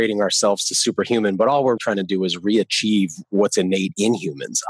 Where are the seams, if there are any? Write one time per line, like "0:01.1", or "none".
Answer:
0:01.8